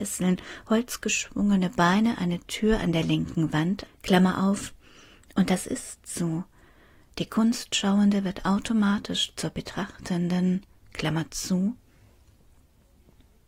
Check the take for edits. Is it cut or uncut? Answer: cut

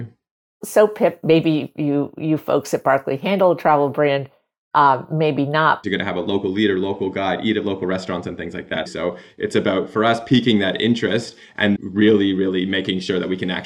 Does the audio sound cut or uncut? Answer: cut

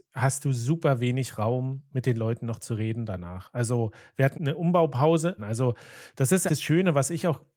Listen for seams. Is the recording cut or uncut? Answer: cut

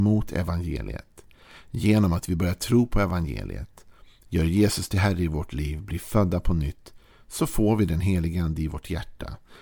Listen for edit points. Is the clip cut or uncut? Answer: uncut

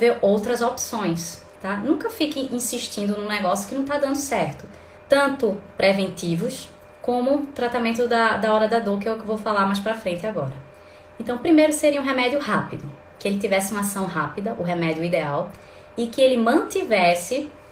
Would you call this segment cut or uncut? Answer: cut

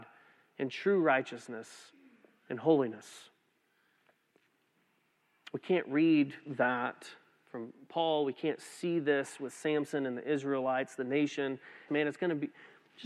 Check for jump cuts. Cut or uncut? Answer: cut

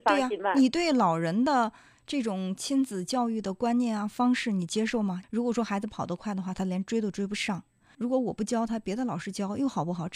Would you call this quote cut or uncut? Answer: cut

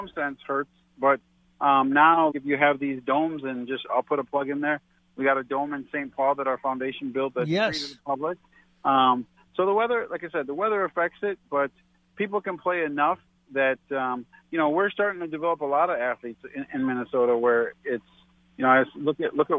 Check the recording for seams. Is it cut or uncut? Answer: cut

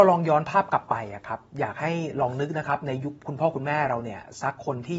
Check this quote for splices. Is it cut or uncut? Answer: uncut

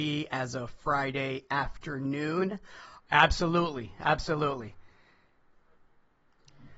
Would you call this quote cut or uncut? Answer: cut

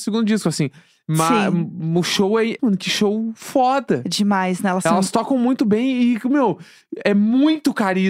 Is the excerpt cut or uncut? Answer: cut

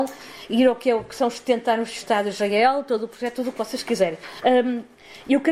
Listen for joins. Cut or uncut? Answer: cut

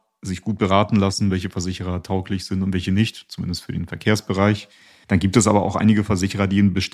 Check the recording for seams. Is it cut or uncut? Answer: cut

